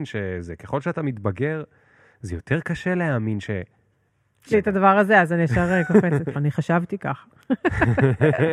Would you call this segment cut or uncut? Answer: cut